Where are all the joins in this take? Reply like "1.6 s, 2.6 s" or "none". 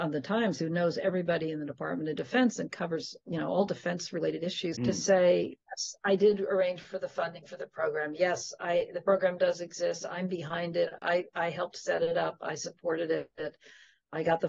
4.8 s